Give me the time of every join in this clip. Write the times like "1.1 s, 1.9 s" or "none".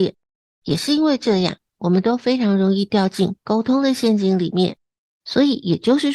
5.1 s